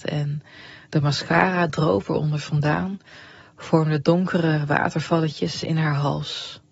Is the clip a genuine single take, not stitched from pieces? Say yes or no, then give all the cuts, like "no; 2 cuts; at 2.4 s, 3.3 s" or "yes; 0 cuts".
yes; 0 cuts